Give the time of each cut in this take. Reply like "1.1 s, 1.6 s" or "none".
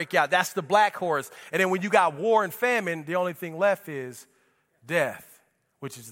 none